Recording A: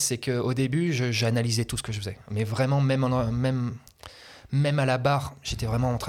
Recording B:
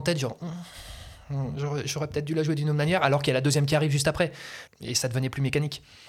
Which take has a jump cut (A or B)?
B